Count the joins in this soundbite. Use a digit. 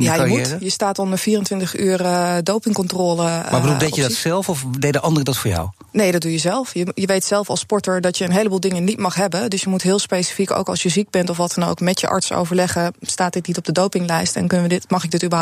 0